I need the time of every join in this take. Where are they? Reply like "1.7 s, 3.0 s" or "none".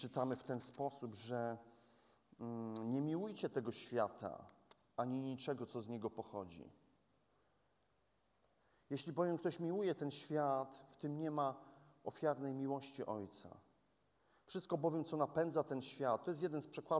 none